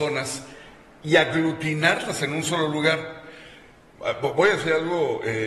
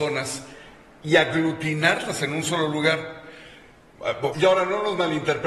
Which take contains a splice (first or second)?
second